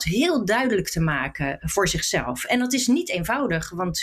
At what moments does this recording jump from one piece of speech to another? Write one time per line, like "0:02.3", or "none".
none